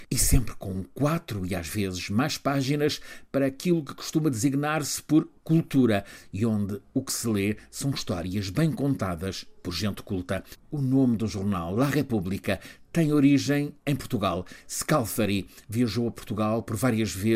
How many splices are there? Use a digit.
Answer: 0